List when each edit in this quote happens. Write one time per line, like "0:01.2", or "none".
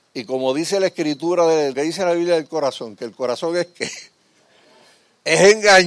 0:01.7